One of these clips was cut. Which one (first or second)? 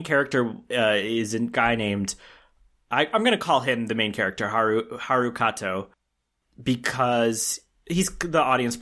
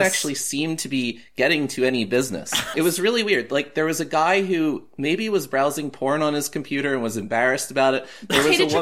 second